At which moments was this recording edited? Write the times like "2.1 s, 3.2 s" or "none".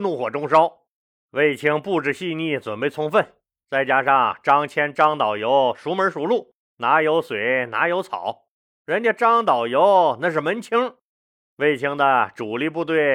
1.2 s, 6.6 s